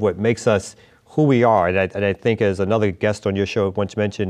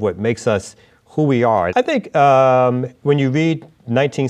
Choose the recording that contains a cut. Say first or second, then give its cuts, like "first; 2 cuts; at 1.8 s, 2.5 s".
second; 1 cut; at 1.7 s